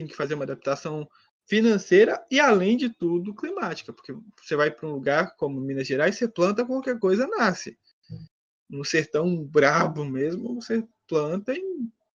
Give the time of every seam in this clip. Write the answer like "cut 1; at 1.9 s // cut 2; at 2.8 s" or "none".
none